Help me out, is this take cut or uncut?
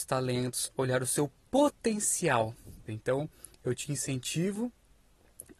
cut